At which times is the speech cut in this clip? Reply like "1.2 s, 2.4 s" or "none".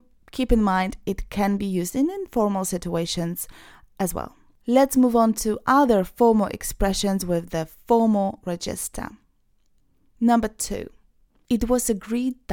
none